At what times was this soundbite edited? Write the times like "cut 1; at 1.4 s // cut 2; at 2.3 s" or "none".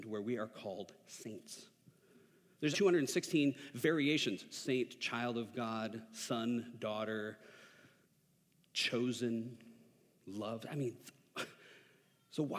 cut 1; at 2.7 s